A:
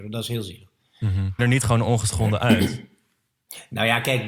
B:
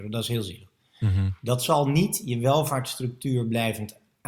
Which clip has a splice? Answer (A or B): A